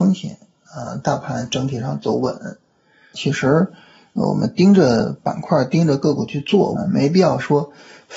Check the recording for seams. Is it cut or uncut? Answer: cut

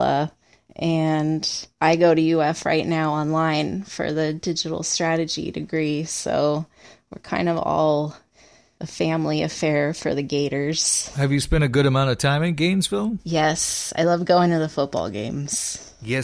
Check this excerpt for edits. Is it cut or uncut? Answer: uncut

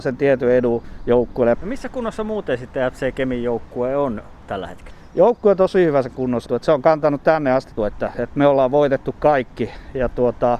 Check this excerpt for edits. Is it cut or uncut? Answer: cut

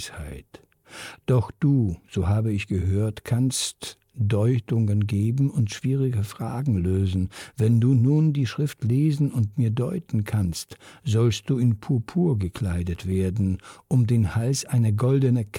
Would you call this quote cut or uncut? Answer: uncut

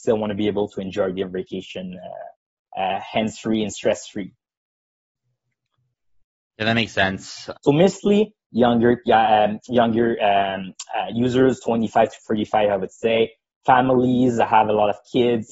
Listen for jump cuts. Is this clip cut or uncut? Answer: cut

